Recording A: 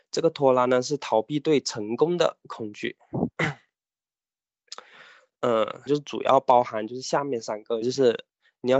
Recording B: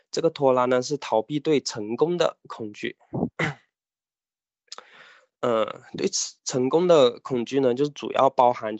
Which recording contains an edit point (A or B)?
A